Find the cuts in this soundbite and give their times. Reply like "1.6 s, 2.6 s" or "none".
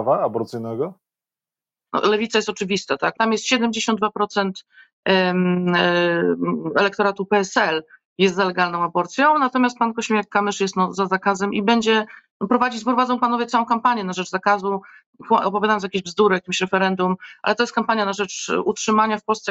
1.9 s, 3.1 s